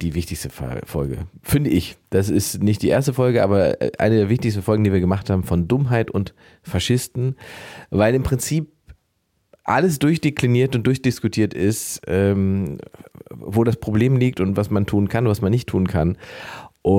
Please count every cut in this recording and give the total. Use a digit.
0